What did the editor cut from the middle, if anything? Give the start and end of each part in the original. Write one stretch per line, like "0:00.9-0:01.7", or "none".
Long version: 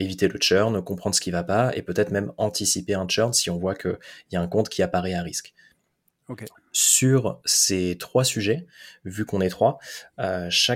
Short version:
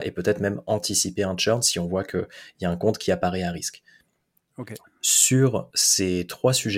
none